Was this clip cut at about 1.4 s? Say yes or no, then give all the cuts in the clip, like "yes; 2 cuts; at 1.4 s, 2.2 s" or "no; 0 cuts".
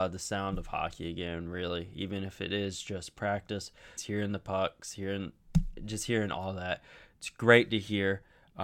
no; 1 cut; at 4.0 s